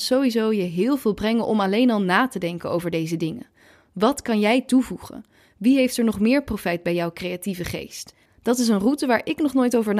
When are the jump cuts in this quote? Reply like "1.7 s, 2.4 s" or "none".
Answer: 8.3 s

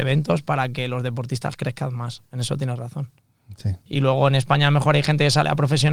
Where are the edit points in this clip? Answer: 3.8 s

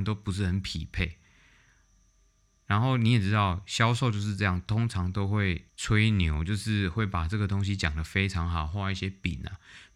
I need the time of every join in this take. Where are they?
5.7 s

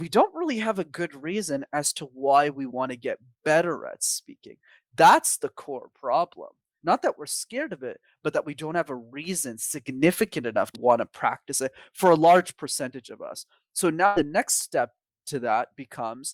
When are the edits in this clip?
10.7 s

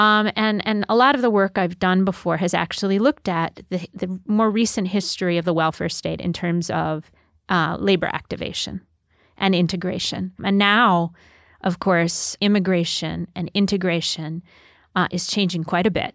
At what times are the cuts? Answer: 10.4 s, 12.4 s

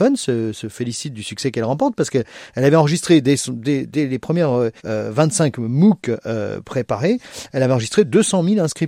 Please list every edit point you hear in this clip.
4.8 s

